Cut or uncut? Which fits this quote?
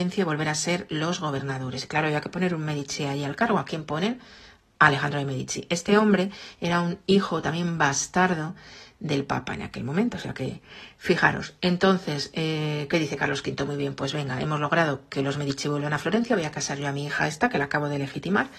uncut